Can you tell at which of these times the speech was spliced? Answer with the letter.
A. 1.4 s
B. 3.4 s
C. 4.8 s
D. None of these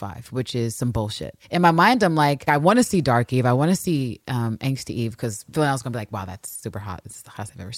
D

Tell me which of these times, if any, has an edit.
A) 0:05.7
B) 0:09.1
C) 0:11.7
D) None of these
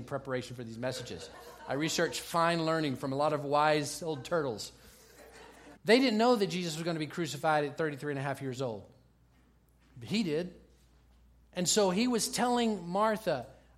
A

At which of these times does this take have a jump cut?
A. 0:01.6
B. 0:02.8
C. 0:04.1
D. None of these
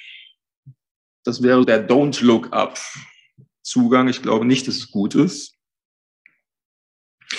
A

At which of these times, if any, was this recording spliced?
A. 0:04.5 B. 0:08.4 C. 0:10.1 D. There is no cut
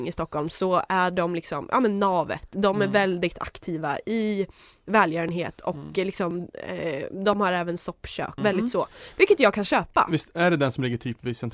B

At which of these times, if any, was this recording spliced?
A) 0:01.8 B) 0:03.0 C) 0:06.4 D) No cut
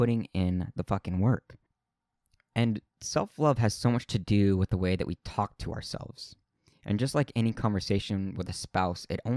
D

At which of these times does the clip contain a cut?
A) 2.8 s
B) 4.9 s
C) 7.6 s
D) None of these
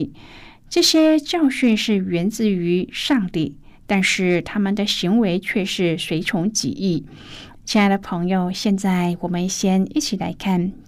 C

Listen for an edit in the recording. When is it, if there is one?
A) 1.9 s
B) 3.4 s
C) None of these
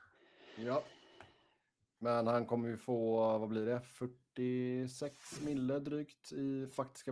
C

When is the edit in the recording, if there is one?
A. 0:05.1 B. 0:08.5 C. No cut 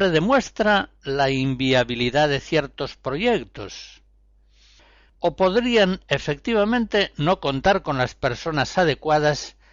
A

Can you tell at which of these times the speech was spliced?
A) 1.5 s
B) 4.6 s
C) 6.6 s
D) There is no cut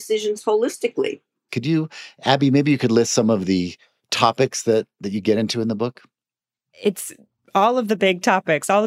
A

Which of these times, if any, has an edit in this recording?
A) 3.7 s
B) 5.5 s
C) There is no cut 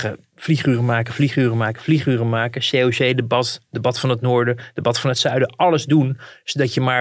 C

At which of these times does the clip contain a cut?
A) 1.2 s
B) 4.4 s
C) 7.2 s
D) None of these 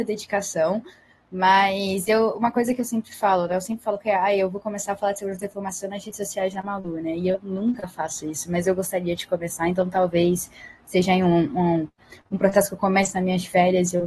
D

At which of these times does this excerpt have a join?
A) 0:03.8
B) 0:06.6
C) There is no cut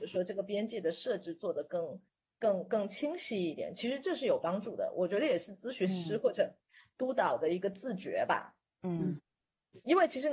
C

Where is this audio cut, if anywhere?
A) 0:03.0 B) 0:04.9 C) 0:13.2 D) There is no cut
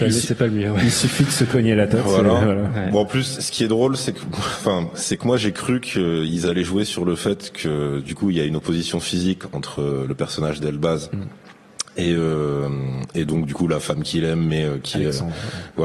D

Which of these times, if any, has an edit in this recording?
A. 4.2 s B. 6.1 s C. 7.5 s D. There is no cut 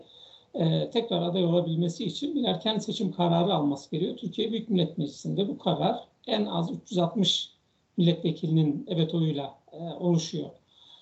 D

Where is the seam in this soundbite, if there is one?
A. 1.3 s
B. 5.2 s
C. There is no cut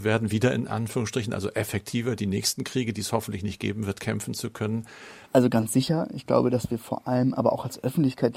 B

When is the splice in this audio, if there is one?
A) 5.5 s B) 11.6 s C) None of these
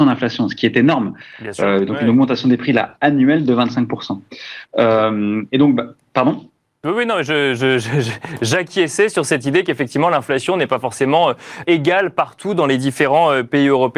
B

